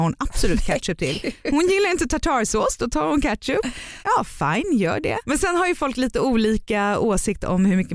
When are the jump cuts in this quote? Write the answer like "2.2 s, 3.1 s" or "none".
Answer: 4.0 s, 5.2 s